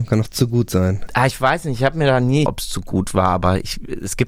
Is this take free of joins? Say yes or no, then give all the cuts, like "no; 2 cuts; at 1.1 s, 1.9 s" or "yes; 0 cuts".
no; 2 cuts; at 1.1 s, 2.5 s